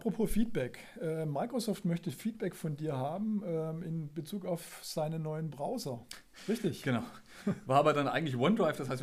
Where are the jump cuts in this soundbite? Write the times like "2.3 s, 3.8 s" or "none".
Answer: none